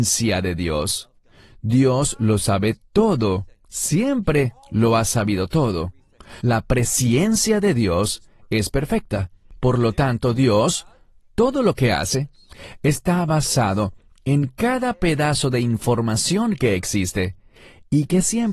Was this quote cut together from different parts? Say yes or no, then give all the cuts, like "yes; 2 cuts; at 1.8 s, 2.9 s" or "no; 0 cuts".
yes; 1 cut; at 6.4 s